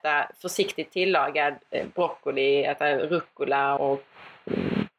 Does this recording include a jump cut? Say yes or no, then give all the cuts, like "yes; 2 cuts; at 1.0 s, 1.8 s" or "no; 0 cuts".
yes; 1 cut; at 3.8 s